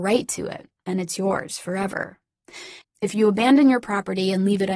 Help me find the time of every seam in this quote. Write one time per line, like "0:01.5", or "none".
0:02.8